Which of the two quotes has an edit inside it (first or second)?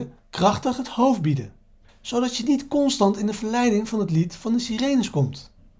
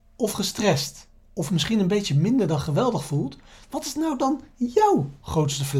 first